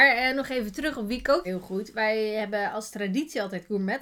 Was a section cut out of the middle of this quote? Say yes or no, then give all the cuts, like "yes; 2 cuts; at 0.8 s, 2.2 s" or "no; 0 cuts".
yes; 1 cut; at 1.4 s